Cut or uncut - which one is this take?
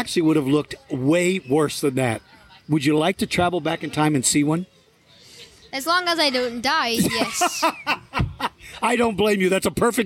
uncut